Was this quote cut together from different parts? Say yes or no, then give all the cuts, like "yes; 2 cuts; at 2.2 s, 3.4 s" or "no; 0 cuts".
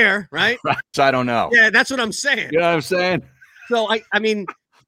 yes; 1 cut; at 0.9 s